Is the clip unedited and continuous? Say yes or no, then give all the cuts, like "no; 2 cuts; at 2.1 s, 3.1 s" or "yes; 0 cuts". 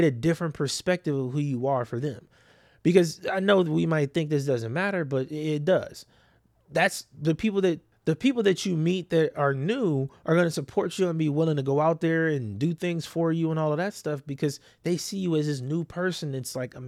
yes; 0 cuts